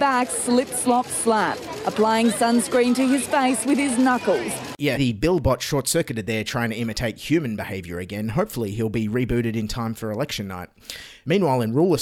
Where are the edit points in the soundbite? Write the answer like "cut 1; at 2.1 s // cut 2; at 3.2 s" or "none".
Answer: cut 1; at 5.0 s